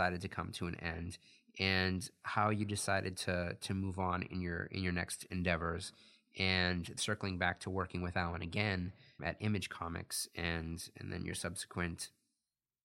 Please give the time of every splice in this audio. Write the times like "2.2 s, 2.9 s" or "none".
7.0 s, 9.2 s